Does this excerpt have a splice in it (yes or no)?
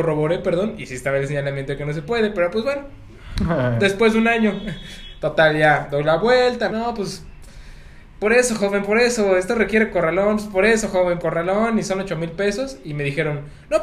yes